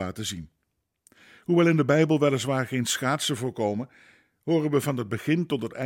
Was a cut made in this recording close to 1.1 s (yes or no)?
no